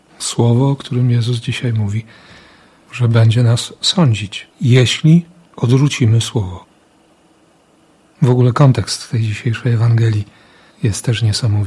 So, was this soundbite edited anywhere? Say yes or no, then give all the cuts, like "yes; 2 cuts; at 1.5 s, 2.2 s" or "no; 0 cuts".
yes; 1 cut; at 4.5 s